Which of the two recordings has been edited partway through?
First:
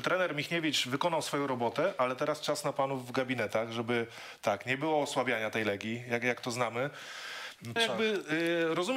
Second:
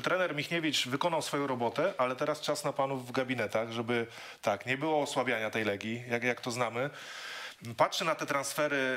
first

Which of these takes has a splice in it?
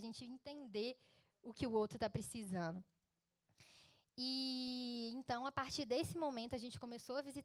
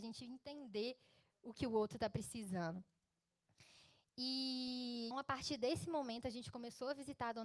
second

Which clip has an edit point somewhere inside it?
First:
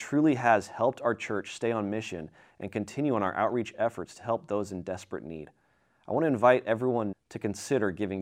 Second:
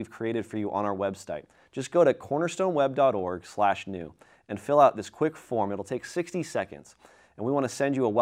first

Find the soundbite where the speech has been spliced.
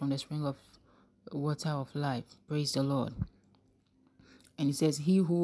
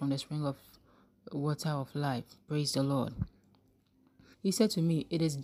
second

